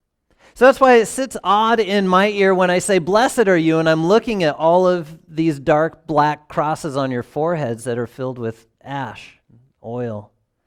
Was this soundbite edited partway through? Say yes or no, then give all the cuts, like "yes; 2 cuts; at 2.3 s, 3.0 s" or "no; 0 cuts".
no; 0 cuts